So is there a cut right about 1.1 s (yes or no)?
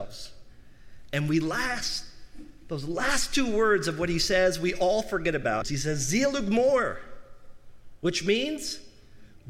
no